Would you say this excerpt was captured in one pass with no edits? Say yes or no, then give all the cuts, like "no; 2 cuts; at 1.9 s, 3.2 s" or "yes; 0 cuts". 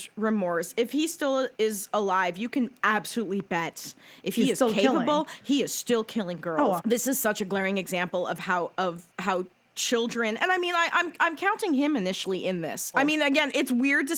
no; 2 cuts; at 6.8 s, 12.9 s